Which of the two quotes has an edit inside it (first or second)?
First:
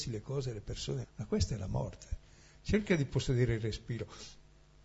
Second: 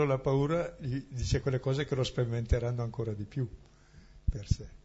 first